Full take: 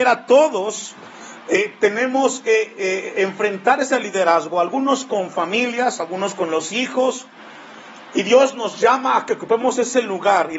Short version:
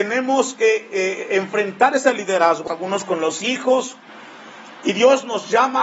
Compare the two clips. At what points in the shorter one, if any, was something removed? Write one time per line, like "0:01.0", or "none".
0:02.7